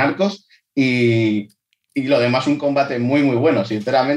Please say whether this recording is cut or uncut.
uncut